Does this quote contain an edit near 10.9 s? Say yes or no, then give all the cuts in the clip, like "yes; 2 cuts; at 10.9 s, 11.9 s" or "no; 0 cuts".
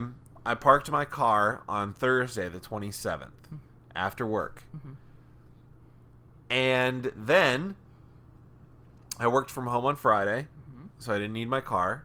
no; 0 cuts